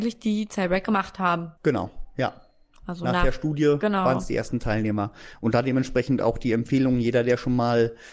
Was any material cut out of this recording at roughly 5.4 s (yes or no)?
no